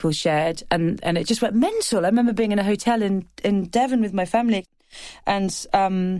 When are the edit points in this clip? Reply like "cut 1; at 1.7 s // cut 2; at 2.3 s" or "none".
none